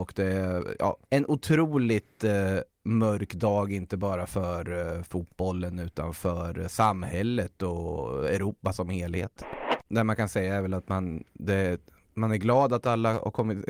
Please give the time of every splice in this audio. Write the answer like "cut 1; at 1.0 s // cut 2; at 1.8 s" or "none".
cut 1; at 1.0 s // cut 2; at 9.8 s